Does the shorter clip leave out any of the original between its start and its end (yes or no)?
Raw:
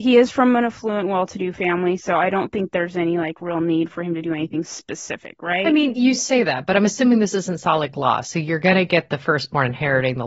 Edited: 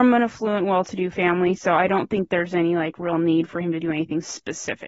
no